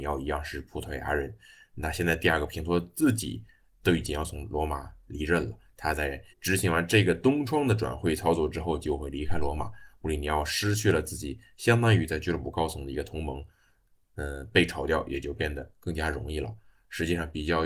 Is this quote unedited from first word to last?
no; 1 cut; at 6.3 s

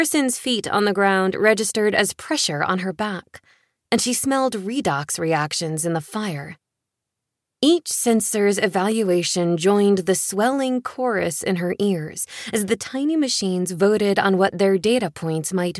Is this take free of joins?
yes; 0 cuts

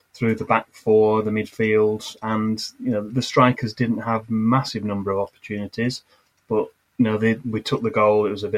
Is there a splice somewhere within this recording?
yes; 1 cut; at 3.1 s

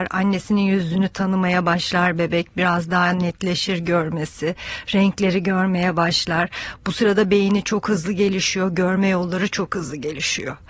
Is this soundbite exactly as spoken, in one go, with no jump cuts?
yes; 0 cuts

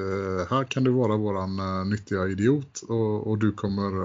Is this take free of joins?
yes; 0 cuts

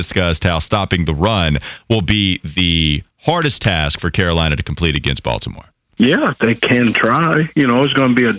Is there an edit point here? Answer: no; 0 cuts

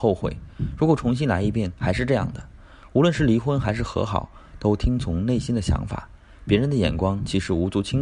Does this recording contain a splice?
no; 0 cuts

